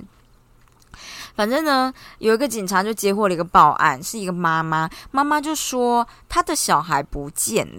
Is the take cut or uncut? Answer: uncut